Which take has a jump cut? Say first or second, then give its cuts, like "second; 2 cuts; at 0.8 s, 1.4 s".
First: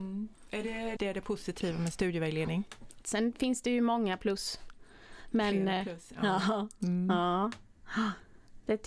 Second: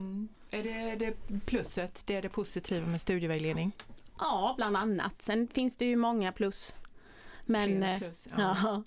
first; 2 cuts; at 1.0 s, 3.0 s